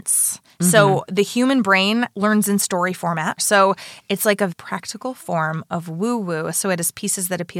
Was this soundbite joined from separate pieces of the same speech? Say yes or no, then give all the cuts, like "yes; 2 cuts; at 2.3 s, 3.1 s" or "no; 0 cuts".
yes; 3 cuts; at 2.1 s, 3.4 s, 4.5 s